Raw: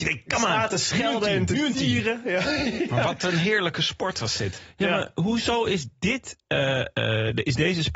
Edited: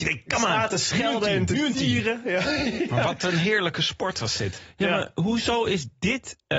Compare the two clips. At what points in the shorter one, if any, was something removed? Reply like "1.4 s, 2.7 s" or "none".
none

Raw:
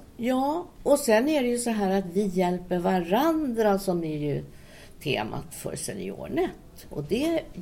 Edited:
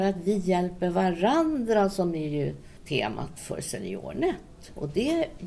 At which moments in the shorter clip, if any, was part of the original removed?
2.8 s

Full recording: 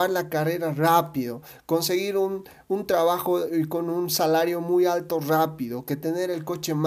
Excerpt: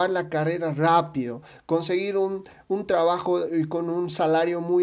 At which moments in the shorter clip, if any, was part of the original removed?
none

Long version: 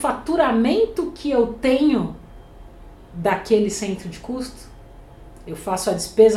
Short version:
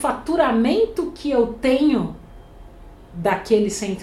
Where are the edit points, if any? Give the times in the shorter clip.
none

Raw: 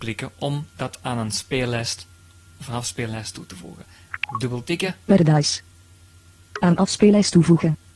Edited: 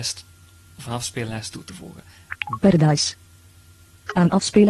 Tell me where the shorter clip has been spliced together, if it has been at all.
2.6 s

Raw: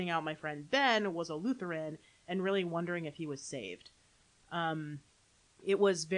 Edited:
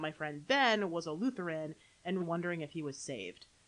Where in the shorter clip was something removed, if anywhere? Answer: 2.2 s

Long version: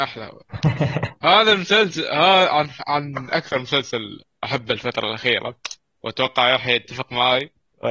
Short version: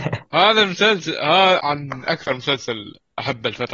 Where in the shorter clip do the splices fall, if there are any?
1.6 s

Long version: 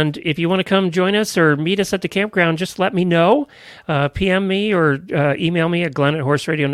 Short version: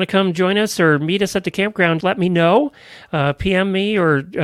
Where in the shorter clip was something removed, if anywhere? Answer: 2.0 s

